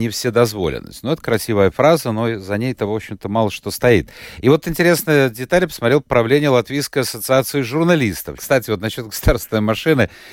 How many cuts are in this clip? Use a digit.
1